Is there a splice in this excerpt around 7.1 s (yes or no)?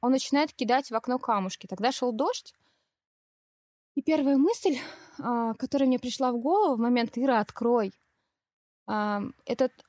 yes